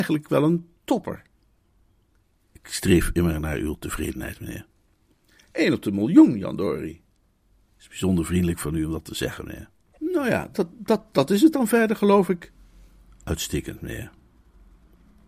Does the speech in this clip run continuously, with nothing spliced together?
yes; 0 cuts

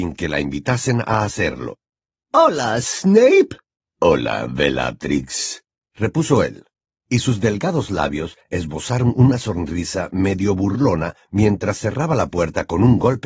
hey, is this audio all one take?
no; 1 cut; at 3.8 s

